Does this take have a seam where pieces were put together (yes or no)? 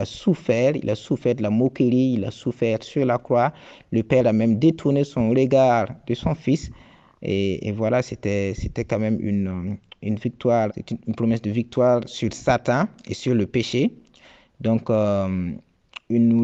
yes